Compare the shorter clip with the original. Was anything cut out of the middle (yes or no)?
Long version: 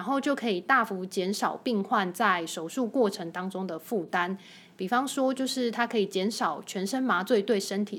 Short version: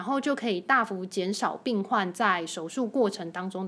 no